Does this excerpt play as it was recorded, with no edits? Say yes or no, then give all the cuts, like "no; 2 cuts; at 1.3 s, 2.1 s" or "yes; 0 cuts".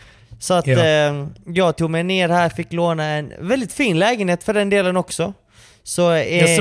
yes; 0 cuts